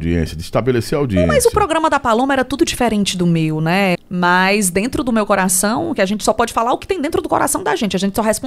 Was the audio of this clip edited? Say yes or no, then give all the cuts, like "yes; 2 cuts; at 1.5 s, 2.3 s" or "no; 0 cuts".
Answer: yes; 2 cuts; at 2.6 s, 3.9 s